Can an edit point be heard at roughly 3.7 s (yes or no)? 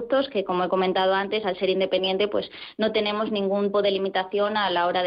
yes